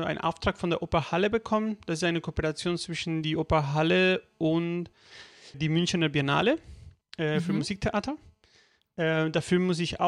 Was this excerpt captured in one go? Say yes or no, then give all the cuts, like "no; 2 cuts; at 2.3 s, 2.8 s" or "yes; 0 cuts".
no; 1 cut; at 5.5 s